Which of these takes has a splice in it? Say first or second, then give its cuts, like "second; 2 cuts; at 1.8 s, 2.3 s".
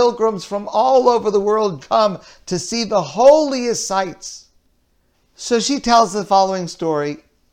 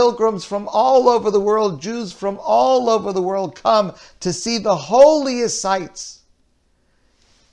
first; 2 cuts; at 1.8 s, 5.1 s